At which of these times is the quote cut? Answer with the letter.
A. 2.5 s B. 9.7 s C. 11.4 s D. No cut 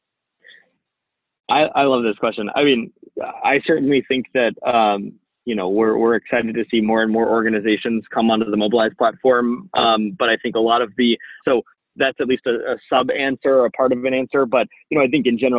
C